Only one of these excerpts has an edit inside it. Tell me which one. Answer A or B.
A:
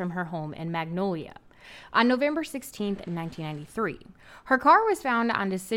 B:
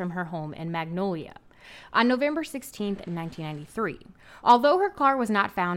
B